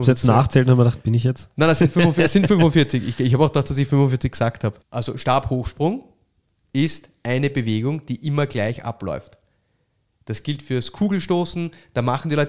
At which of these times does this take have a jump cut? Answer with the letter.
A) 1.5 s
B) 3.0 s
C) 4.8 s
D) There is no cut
C